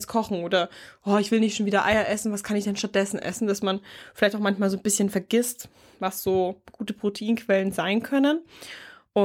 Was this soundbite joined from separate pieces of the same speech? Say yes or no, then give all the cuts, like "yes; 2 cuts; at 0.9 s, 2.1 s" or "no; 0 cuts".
no; 0 cuts